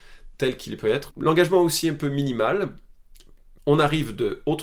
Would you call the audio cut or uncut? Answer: cut